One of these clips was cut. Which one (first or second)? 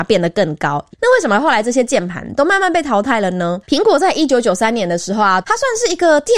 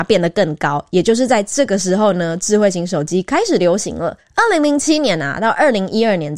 first